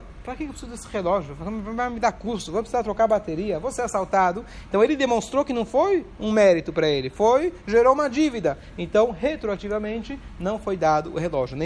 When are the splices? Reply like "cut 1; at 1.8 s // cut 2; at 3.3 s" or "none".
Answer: none